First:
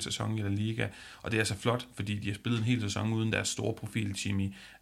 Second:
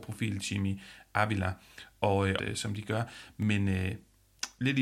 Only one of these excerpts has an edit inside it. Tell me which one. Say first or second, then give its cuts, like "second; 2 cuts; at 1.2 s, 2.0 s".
second; 1 cut; at 2.4 s